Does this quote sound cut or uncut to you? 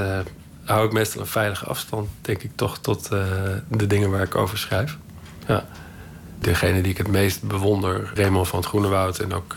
cut